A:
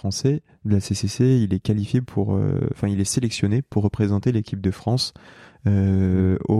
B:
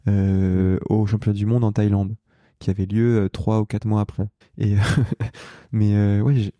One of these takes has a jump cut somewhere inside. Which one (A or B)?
B